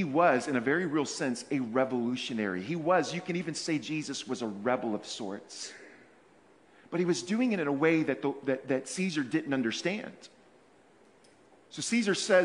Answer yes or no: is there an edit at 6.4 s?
no